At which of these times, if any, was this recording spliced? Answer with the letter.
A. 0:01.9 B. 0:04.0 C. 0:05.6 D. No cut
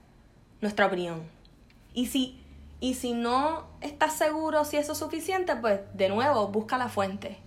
A